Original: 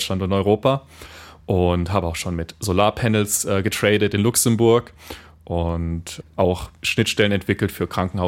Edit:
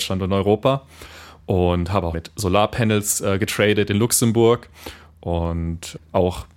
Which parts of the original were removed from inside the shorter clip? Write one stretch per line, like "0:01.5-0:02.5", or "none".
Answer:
0:02.1-0:02.4